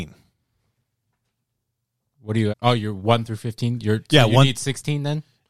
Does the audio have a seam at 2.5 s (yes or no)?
yes